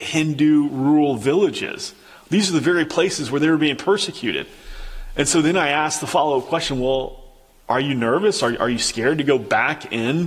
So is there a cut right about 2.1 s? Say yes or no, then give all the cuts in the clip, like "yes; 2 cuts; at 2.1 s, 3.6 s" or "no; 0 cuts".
no; 0 cuts